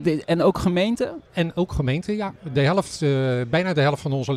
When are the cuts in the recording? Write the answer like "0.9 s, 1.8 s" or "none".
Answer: 1.3 s